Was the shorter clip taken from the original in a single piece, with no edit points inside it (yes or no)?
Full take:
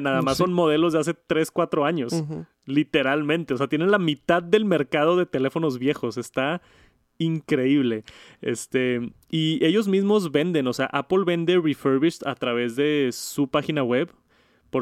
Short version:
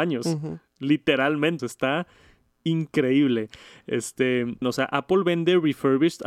no